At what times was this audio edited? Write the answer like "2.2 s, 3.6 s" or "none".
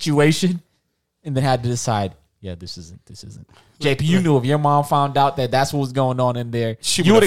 none